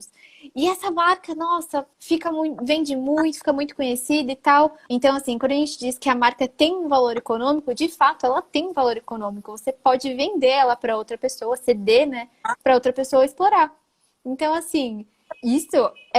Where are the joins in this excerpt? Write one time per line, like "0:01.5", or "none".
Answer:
0:01.9
0:04.9

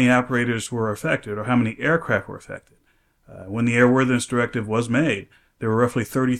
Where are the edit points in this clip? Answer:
none

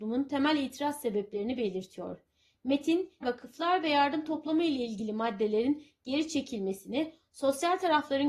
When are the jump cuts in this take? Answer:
0:03.2

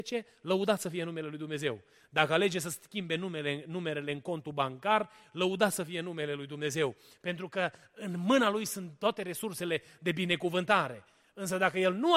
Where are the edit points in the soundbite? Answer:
none

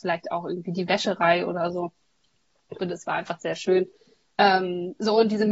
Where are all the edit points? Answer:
0:02.8

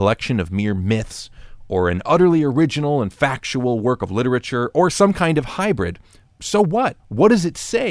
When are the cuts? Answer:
0:07.0

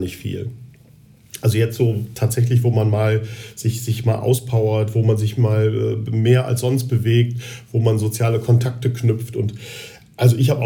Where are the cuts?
none

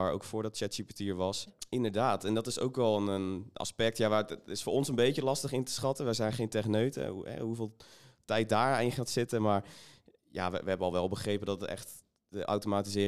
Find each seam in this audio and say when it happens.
0:01.5

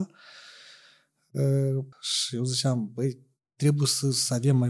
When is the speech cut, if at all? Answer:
0:01.9

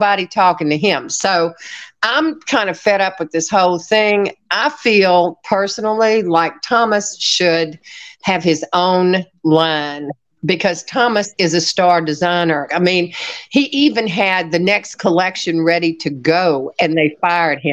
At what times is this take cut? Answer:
0:12.7

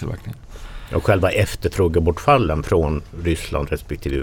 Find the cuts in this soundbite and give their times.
none

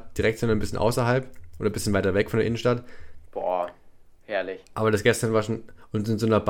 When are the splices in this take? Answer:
0:03.3

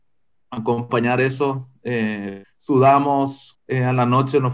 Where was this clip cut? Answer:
0:02.4
0:03.5

